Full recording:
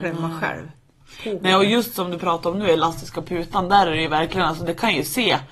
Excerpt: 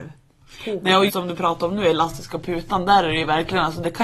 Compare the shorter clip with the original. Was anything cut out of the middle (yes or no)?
yes